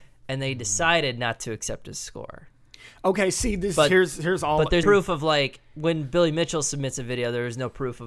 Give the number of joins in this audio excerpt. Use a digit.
1